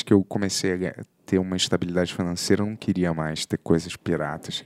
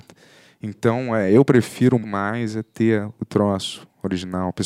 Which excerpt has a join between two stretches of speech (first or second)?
second